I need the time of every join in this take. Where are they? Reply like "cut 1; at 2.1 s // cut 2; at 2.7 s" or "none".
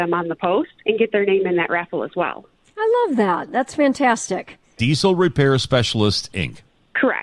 none